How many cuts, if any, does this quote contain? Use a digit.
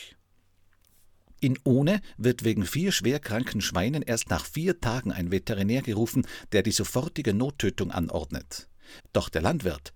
1